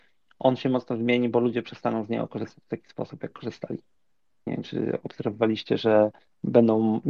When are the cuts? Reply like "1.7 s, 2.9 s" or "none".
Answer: 4.5 s